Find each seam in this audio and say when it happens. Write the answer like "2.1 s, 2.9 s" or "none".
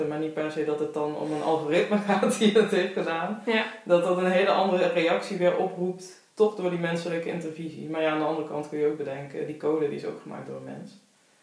none